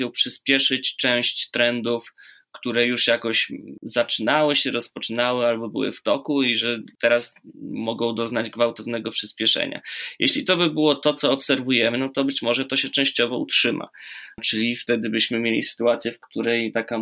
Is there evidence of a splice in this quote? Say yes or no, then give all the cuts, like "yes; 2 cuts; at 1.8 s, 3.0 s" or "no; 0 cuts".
no; 0 cuts